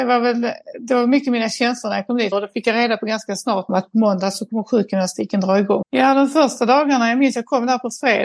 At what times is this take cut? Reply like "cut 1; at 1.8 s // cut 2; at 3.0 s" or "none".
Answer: cut 1; at 2.3 s // cut 2; at 3.7 s // cut 3; at 5.8 s